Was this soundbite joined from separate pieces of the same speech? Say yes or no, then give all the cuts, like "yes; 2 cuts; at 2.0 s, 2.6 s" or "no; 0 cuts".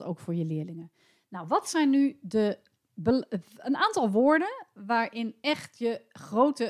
no; 0 cuts